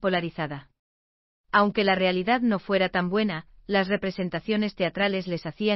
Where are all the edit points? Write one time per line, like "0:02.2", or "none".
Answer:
0:01.4